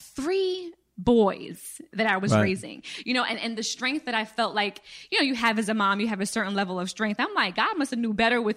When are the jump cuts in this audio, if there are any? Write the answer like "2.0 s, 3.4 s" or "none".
none